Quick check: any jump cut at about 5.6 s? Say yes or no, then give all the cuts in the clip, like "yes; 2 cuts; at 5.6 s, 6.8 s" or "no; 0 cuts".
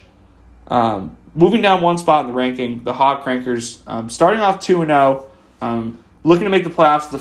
yes; 1 cut; at 5.6 s